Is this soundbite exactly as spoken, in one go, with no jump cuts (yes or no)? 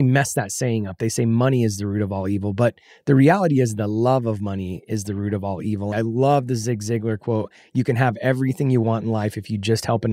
no